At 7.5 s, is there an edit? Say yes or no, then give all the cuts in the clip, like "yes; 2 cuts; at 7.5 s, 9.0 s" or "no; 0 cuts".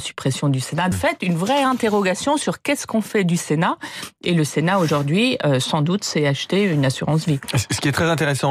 no; 1 cut; at 0.9 s